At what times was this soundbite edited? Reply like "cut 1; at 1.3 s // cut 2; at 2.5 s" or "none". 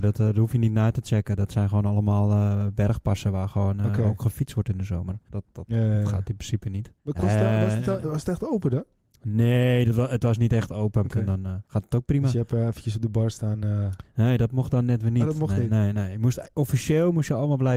cut 1; at 5.3 s // cut 2; at 7.0 s // cut 3; at 11.0 s